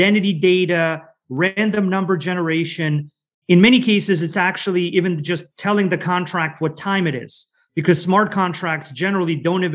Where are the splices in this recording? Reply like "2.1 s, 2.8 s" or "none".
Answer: none